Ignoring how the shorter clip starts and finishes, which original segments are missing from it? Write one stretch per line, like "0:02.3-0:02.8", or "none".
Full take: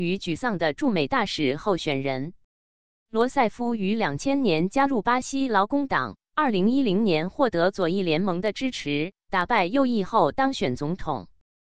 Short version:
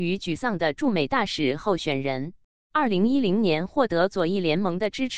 0:02.7-0:06.3